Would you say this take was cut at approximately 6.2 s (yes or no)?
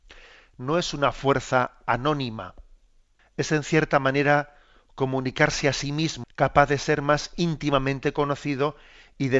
yes